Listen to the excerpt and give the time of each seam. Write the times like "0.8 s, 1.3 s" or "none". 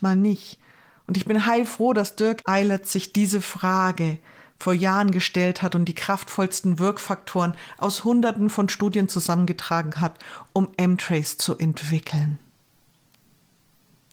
none

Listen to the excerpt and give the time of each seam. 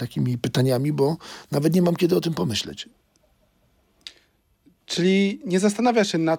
none

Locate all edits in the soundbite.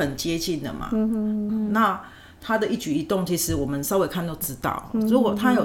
1.5 s

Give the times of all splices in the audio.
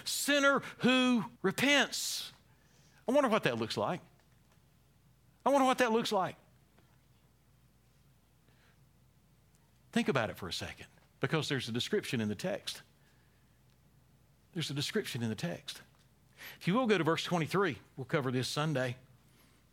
1.4 s

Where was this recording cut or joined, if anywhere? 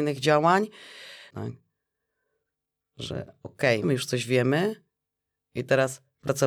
1.3 s, 3.8 s

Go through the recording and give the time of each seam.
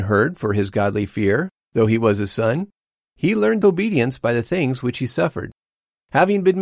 none

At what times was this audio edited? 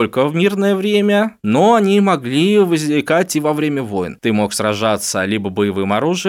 4.2 s

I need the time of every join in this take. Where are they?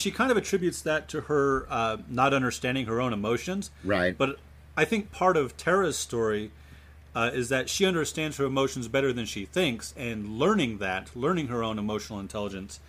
none

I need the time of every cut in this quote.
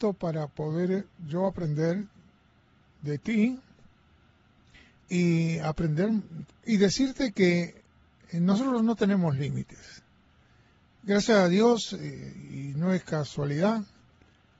6.5 s

